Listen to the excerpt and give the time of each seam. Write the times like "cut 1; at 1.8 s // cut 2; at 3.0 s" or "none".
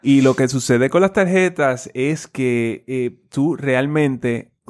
none